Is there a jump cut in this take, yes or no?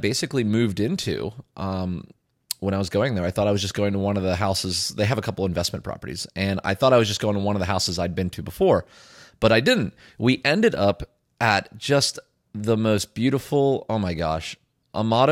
no